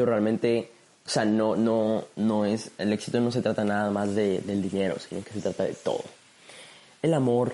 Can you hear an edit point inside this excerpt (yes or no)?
no